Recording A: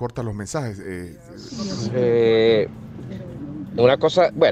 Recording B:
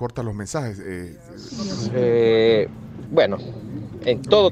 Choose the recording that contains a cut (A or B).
B